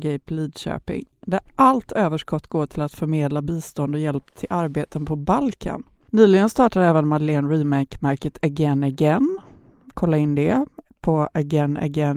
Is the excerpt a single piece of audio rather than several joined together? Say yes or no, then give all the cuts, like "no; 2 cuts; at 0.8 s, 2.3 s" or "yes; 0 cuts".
yes; 0 cuts